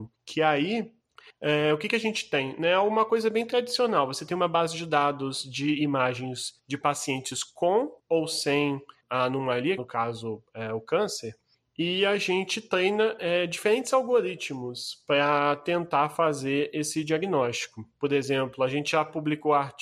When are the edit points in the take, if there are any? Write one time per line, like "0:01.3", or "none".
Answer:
0:09.8